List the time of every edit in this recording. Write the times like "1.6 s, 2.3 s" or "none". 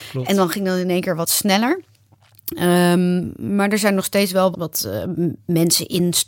4.5 s